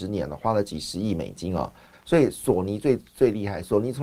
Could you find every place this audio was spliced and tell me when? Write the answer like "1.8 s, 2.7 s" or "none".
1.9 s